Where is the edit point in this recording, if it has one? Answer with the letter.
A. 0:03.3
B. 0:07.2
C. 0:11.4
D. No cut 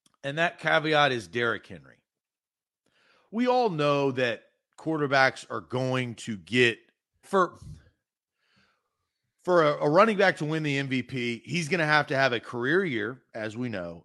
B